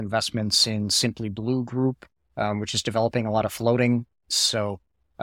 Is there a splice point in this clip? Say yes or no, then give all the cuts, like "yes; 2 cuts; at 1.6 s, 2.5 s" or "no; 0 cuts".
yes; 1 cut; at 4.3 s